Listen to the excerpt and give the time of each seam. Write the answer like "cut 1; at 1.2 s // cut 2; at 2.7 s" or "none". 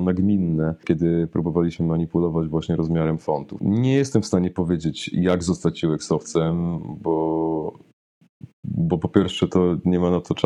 none